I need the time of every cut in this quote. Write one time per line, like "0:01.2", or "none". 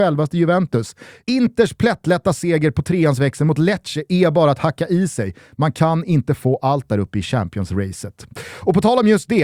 none